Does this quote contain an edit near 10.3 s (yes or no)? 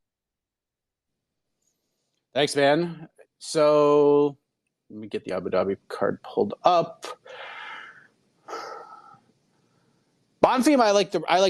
no